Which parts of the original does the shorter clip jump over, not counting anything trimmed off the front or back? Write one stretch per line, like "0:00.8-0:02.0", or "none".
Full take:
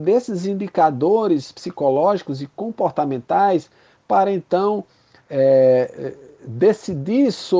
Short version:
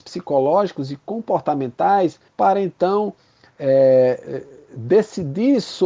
0:03.8-0:04.0